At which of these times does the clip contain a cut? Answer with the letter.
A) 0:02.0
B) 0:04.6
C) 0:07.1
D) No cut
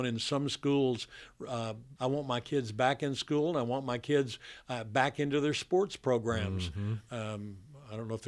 A